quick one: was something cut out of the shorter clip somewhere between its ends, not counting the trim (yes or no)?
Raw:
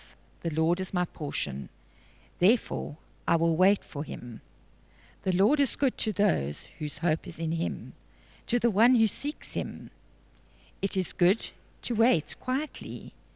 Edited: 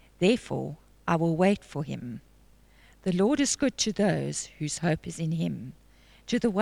no